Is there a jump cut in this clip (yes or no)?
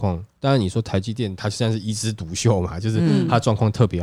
yes